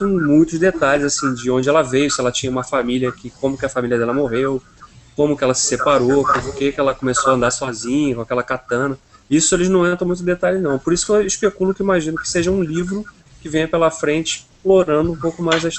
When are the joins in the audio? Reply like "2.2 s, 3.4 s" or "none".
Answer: none